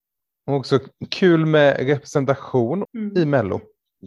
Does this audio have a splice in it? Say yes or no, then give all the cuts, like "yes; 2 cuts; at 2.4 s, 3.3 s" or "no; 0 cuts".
yes; 1 cut; at 2.8 s